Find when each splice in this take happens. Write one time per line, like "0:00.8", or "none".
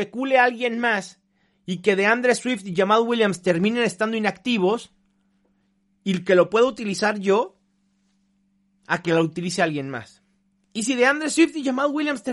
none